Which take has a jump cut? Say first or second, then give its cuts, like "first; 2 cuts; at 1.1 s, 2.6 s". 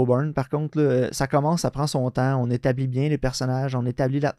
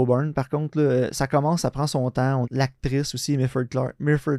second; 1 cut; at 2.4 s